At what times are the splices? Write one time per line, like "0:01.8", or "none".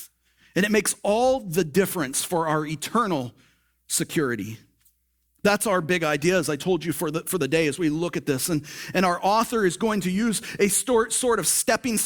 none